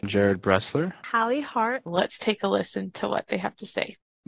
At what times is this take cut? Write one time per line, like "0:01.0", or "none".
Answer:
0:01.9